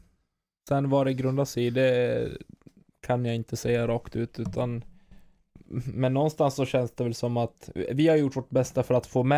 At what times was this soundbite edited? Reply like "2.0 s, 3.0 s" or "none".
none